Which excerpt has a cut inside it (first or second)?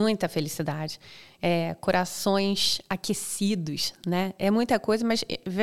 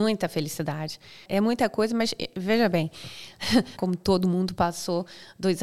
second